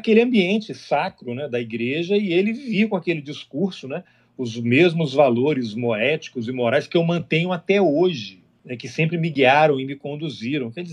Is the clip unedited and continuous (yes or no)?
yes